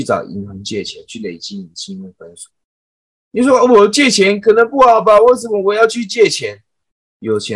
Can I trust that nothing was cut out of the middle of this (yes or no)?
yes